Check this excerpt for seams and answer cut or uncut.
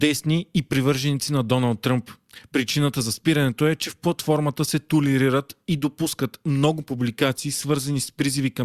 uncut